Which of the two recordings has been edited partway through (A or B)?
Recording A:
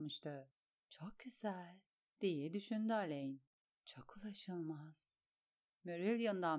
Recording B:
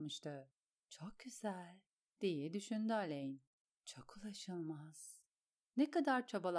A